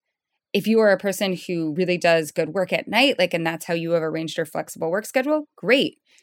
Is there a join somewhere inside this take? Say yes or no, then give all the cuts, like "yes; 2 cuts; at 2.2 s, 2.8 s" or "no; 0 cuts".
no; 0 cuts